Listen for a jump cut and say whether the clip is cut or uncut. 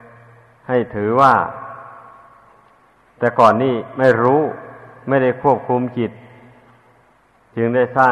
uncut